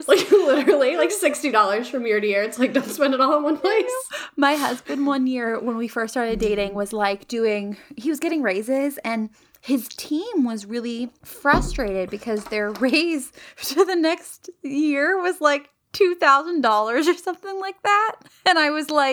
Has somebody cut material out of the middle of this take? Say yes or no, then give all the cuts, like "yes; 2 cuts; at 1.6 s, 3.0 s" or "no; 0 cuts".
no; 0 cuts